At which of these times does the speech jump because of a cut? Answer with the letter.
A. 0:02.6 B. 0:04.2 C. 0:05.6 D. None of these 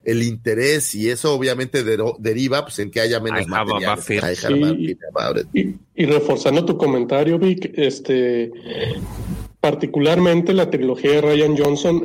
B